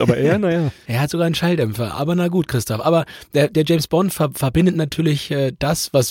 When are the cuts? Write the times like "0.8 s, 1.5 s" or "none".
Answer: none